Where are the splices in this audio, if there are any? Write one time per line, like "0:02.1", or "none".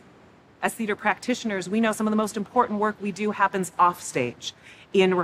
none